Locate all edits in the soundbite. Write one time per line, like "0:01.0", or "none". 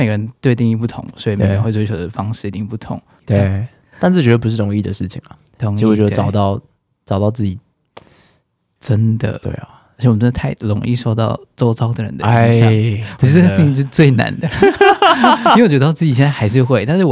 0:03.2
0:08.8